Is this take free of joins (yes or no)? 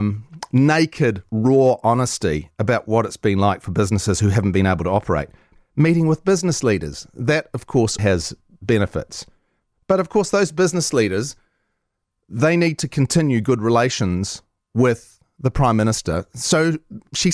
no